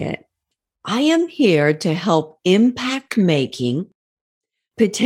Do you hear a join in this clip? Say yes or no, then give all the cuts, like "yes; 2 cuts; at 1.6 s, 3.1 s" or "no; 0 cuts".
no; 0 cuts